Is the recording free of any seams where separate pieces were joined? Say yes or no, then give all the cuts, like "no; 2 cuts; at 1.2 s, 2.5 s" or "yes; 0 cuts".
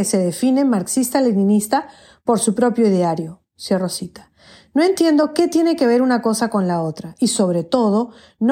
yes; 0 cuts